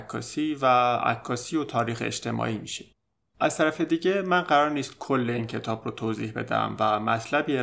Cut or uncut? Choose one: cut